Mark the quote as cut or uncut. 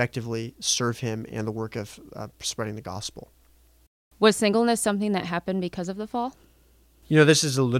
uncut